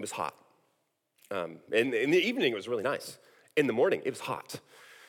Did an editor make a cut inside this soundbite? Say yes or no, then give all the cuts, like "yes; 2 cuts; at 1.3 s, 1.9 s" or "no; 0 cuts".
no; 0 cuts